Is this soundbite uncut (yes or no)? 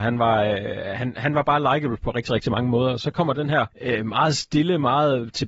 no